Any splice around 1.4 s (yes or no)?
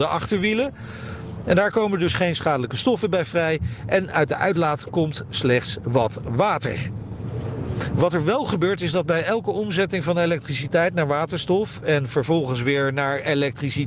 no